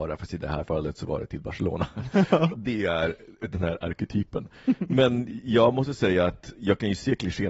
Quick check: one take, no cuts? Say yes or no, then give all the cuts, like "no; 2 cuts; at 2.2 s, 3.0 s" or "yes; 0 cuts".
no; 1 cut; at 2.5 s